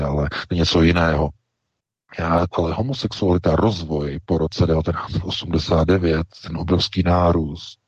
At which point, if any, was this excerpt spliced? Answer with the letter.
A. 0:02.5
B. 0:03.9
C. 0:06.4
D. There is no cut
A